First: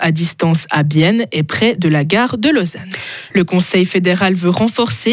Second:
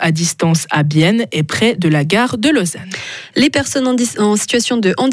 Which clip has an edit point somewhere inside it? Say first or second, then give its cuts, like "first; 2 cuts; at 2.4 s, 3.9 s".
first; 1 cut; at 3.3 s